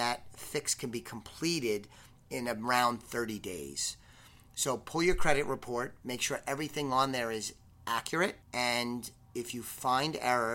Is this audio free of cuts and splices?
no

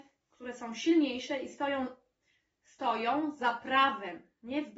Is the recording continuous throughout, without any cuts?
yes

